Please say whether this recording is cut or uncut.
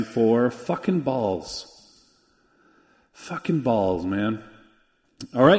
uncut